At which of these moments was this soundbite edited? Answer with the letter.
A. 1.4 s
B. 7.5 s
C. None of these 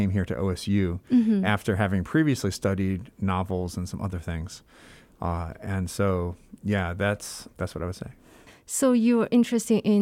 B